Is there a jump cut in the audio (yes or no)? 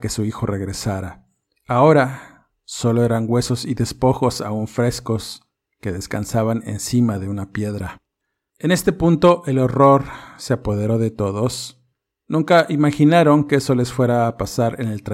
no